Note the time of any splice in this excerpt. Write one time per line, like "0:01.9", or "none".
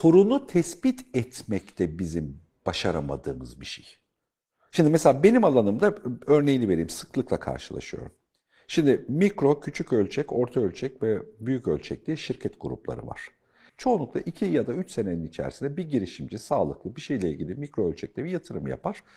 0:13.7